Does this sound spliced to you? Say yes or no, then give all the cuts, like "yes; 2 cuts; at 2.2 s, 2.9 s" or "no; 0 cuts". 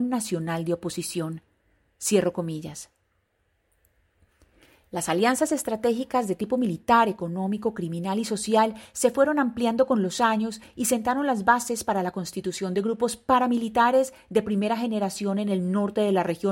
no; 0 cuts